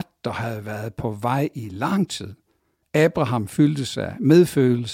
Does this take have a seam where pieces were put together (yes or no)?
yes